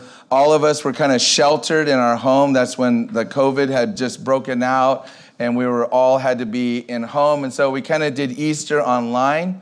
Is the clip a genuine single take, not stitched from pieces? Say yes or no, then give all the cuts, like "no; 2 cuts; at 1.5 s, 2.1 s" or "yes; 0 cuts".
yes; 0 cuts